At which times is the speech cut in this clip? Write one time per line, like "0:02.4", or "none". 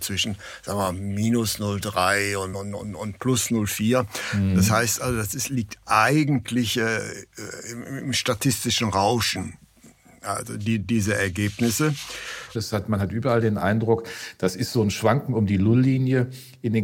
0:02.5
0:12.6